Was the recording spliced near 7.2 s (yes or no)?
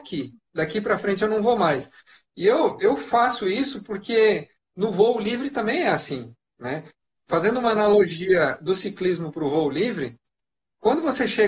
no